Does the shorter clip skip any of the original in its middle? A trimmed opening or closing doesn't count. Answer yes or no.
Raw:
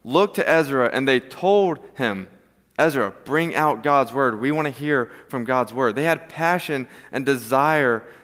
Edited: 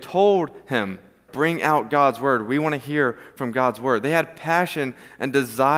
yes